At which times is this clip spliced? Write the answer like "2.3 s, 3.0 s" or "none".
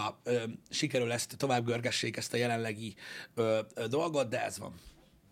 none